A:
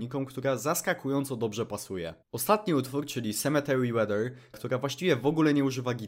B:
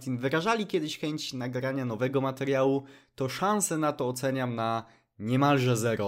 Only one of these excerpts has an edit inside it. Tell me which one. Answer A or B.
A